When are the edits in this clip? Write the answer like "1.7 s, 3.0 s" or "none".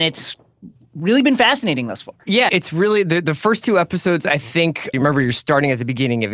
2.5 s, 4.9 s